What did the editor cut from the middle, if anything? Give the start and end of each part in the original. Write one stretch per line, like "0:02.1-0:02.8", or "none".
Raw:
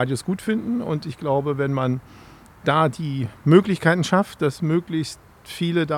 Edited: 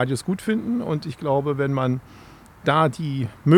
none